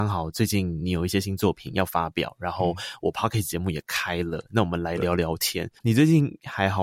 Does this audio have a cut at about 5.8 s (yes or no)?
yes